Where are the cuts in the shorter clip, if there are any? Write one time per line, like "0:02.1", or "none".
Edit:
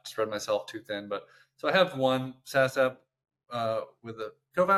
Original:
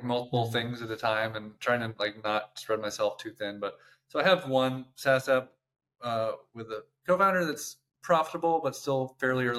none

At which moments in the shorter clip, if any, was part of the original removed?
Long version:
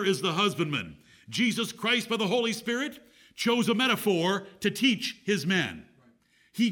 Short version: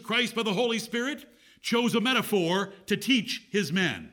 none

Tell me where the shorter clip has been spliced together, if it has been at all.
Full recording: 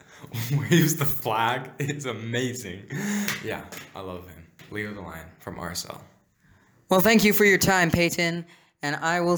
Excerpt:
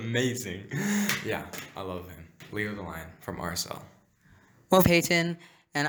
0:04.8

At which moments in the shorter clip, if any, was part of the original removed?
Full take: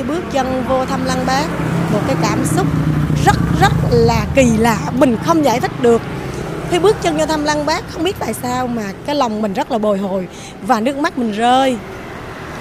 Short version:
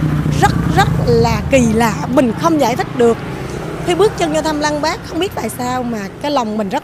none

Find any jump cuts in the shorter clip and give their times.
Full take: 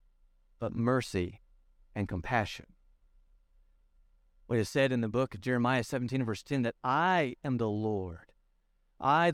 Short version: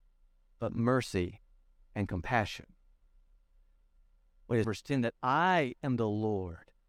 0:04.6

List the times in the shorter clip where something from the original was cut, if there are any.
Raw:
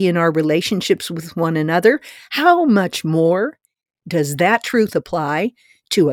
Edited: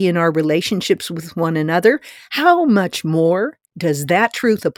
0:03.7

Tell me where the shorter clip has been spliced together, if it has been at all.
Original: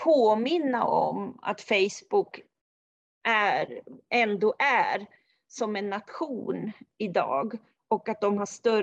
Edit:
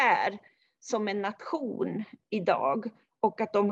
none

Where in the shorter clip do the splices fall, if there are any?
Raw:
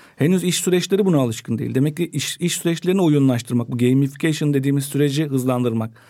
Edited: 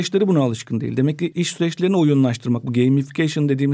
0:01.3

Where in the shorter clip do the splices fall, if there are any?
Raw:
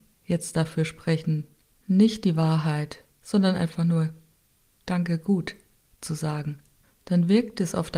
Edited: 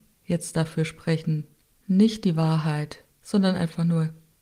none

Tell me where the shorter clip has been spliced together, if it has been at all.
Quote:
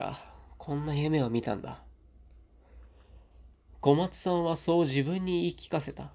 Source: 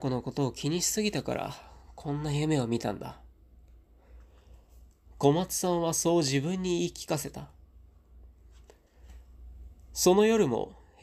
none

